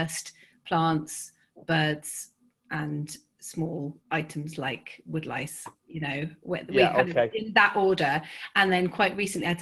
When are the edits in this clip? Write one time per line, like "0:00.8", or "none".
0:04.0